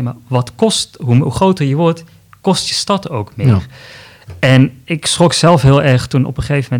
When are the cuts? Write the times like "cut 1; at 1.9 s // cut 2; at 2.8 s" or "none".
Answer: none